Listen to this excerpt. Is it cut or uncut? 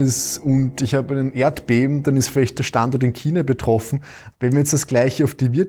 cut